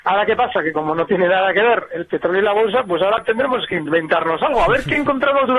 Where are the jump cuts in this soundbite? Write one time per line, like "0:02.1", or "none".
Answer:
none